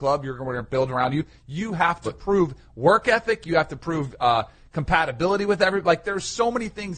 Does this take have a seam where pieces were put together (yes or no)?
no